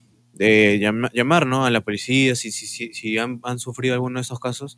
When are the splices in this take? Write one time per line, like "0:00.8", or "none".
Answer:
none